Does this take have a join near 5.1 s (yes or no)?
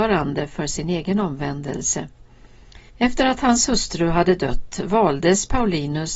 no